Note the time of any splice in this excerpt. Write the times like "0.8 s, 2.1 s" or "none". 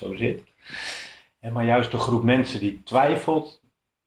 none

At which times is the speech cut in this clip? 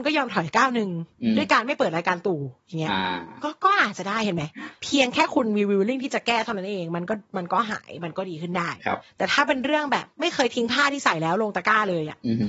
10.1 s

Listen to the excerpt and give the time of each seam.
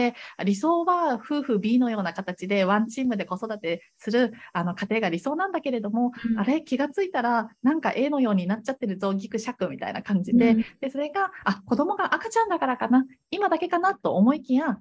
none

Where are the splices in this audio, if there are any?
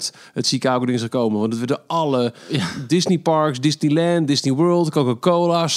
none

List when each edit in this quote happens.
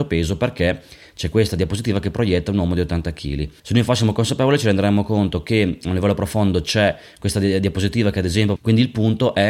3.6 s, 8.6 s

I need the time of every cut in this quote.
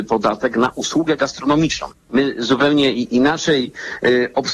1.9 s

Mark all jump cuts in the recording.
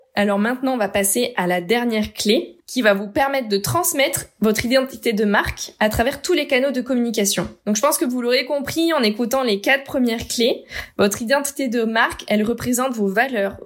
2.6 s

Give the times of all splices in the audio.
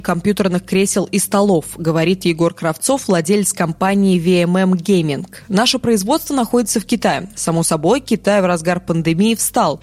none

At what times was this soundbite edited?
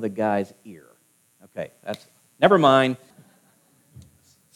3.1 s

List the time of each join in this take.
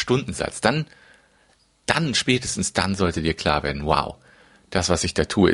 none

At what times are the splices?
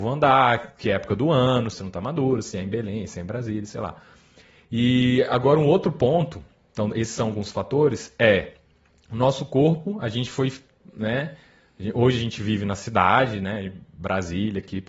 1.7 s

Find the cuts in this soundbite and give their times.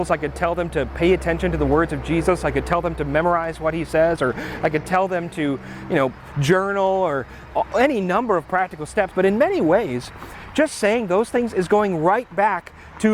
9.1 s

